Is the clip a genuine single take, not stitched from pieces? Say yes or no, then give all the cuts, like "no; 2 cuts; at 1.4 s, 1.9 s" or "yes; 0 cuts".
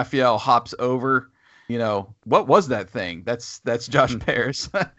no; 1 cut; at 1.7 s